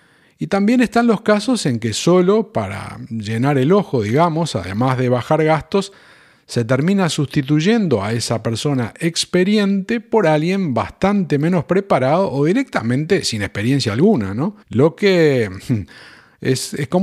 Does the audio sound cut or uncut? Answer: cut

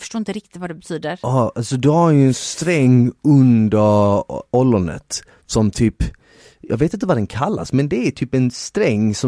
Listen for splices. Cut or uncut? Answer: uncut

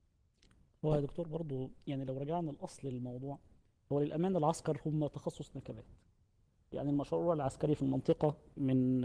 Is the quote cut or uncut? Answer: uncut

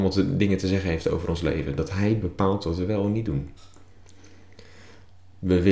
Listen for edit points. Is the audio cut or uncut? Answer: uncut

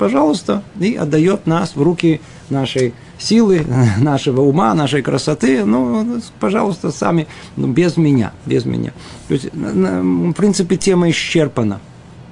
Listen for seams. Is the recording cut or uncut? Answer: uncut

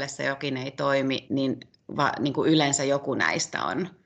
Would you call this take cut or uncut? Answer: cut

